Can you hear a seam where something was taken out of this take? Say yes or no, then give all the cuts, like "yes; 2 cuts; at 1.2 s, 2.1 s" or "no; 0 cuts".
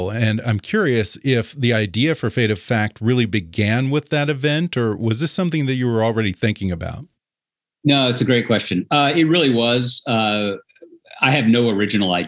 no; 0 cuts